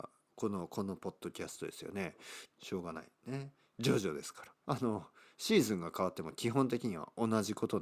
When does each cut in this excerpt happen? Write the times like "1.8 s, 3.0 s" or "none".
2.5 s, 4.6 s